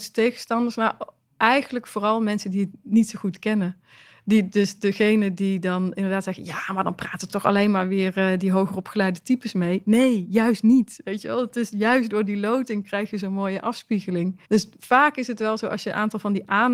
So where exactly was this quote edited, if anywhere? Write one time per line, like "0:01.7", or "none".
0:07.3
0:14.4